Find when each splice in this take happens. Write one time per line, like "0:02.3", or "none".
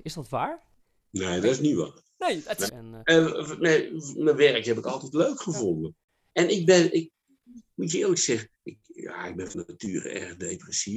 0:02.7
0:06.3
0:08.5

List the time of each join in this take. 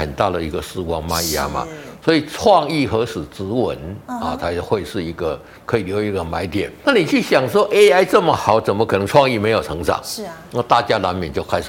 0:06.8

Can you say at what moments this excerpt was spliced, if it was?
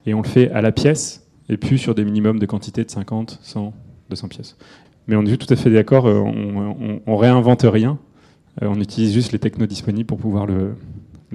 0:04.8

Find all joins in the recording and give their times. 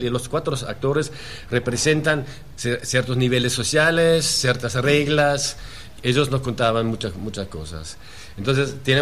0:06.0

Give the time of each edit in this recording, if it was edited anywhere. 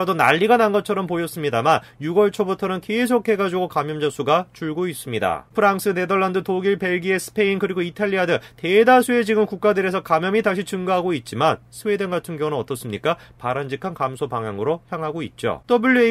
none

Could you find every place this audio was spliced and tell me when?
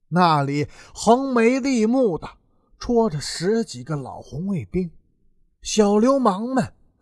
none

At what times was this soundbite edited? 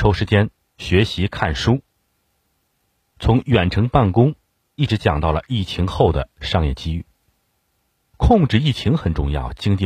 none

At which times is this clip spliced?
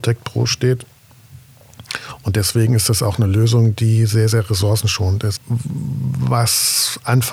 0:05.4

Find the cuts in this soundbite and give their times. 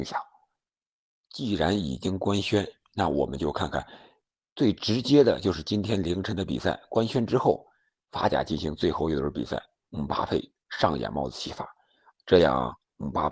0:04.5

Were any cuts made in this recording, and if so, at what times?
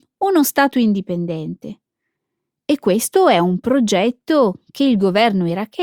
none

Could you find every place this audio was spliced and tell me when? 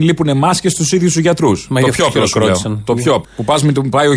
0:03.2

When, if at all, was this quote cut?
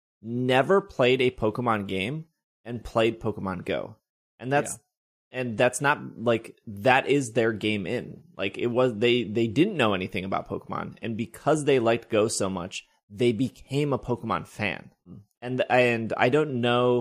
none

